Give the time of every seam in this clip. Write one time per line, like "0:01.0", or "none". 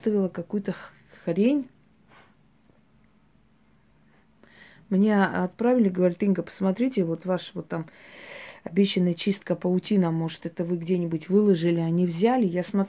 none